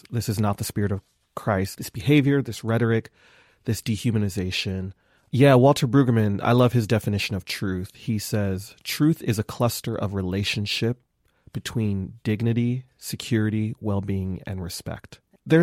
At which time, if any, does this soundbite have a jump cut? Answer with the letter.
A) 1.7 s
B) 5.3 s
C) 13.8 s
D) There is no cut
A